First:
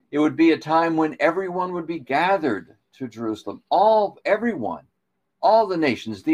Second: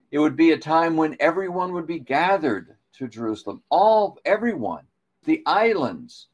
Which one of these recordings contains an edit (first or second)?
second